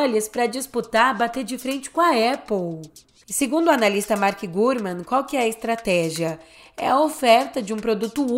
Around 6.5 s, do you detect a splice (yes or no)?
no